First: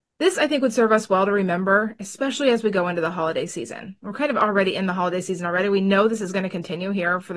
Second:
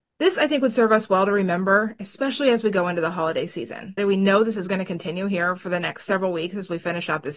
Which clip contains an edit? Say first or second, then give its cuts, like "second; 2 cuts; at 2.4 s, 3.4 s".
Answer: second; 1 cut; at 4.0 s